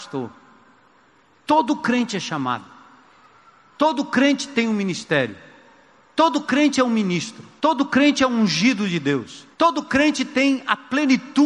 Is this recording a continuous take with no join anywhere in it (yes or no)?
no